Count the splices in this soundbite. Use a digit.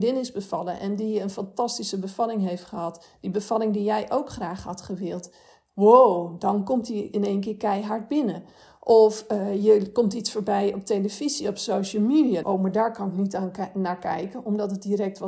1